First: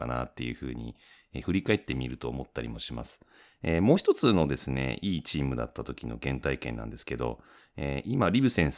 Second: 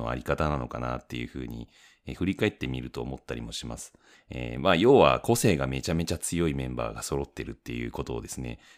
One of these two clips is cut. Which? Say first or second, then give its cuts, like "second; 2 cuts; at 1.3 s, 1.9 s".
second; 1 cut; at 4.1 s